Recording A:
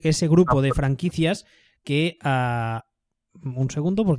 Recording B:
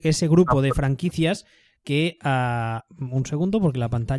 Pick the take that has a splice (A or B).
B